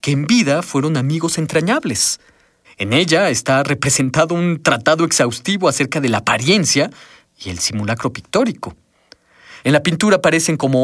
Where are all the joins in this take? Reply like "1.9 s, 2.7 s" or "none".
2.6 s, 9.6 s